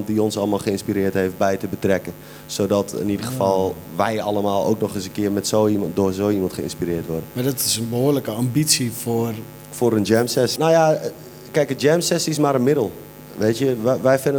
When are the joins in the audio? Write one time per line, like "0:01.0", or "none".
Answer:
0:10.6